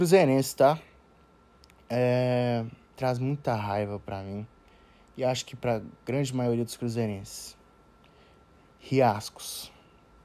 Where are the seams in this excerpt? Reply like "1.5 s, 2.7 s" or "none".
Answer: 2.9 s